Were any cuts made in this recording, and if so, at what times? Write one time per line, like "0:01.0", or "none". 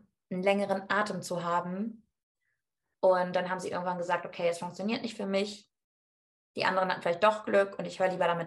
0:02.9